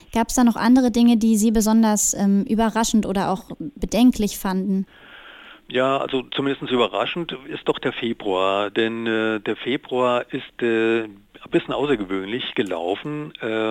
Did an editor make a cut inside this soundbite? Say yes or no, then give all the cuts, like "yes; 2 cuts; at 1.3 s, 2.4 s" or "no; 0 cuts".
no; 0 cuts